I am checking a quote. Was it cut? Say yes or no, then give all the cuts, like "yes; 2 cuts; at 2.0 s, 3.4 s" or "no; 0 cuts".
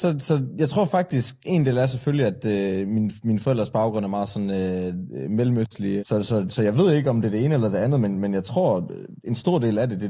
yes; 2 cuts; at 1.4 s, 6.0 s